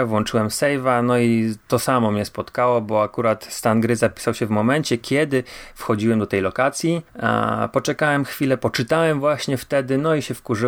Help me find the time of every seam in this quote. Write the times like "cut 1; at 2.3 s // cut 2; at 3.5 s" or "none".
cut 1; at 7.1 s